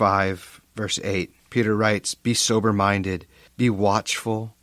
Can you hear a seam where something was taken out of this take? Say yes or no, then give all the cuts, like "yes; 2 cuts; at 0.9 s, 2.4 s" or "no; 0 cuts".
no; 0 cuts